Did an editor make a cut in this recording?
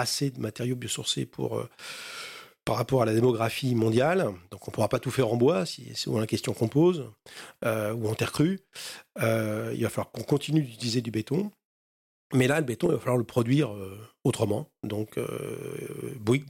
no; 0 cuts

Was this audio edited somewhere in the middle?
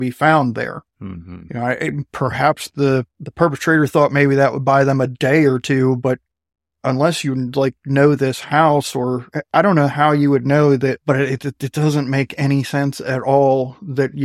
yes; 1 cut; at 11.0 s

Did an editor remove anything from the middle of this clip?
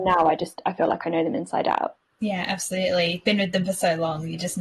no; 0 cuts

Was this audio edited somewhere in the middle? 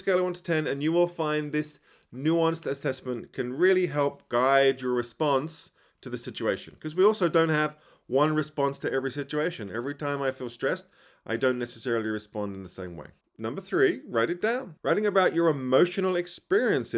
yes; 1 cut; at 14.8 s

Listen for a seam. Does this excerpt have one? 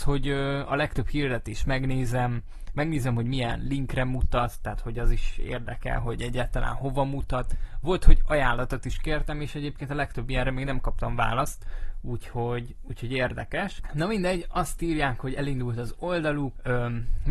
no; 0 cuts

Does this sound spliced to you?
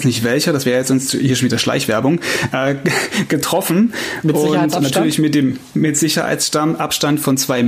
no; 0 cuts

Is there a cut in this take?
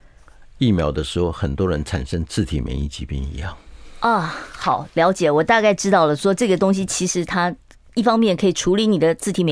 no; 0 cuts

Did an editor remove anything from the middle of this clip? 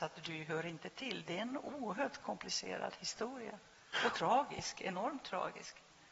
no; 0 cuts

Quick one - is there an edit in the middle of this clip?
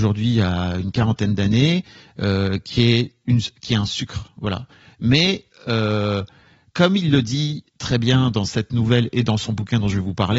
no; 0 cuts

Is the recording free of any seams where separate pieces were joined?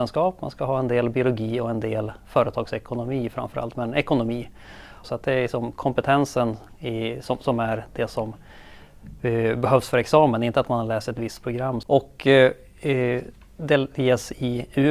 no; 2 cuts; at 5.0 s, 11.8 s

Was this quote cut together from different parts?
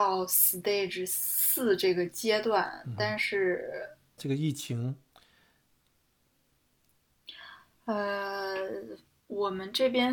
yes; 1 cut; at 4.2 s

